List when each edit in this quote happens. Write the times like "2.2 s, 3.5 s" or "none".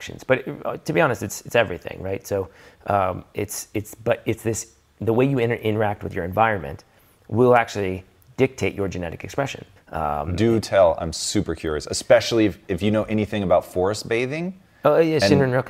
9.8 s